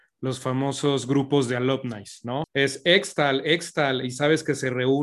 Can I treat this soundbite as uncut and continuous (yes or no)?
no